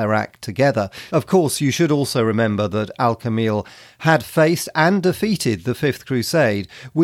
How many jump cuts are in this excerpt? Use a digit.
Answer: 1